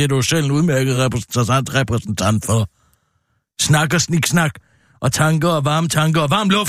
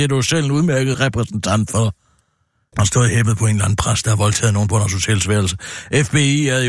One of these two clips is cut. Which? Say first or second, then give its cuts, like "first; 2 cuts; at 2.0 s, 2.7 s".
second; 2 cuts; at 0.9 s, 2.7 s